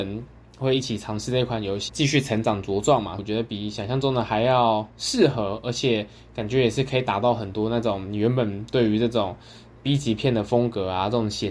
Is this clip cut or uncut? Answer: cut